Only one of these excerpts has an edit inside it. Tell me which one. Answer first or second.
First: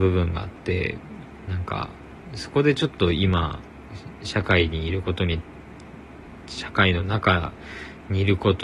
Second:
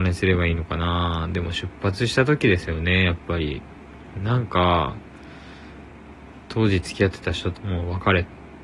second